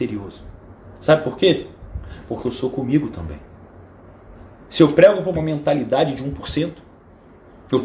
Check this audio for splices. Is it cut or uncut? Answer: uncut